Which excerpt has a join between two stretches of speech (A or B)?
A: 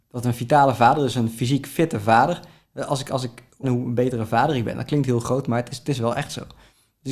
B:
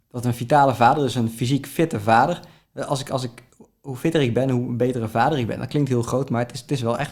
A